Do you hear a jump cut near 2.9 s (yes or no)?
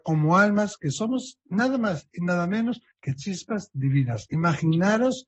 yes